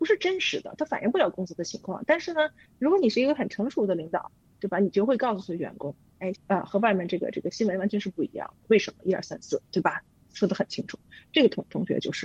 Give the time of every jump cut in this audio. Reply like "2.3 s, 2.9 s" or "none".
6.3 s